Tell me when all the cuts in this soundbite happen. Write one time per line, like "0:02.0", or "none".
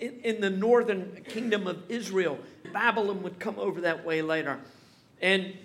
0:02.6

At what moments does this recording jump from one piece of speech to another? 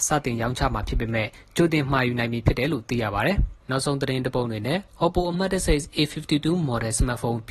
0:03.6

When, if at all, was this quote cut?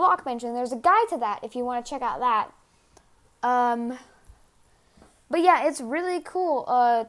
none

